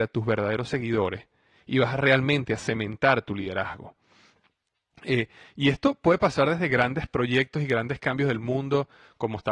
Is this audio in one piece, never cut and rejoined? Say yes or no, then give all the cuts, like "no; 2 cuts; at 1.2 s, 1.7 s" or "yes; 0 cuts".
yes; 0 cuts